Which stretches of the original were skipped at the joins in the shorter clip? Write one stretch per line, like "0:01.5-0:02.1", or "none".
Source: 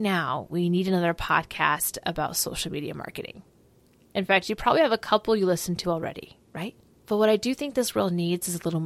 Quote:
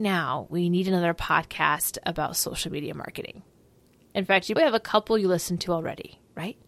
0:04.6-0:04.7